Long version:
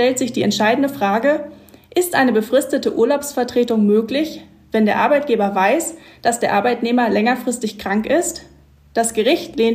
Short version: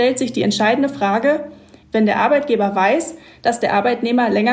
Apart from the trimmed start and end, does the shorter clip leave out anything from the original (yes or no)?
yes